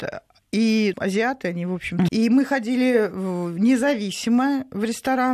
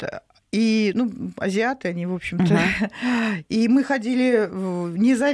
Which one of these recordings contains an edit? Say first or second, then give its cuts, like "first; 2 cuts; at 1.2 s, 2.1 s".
first; 2 cuts; at 0.9 s, 2.1 s